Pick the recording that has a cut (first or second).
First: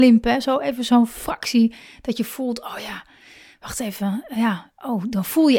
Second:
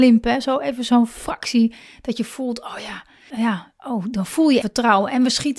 second